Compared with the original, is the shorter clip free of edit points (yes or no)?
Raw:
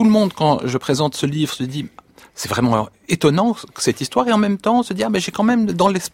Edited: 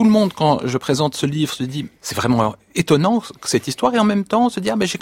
no